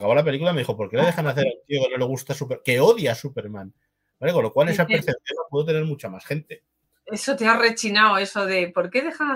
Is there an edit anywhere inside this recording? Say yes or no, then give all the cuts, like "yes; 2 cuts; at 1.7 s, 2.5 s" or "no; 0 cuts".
no; 0 cuts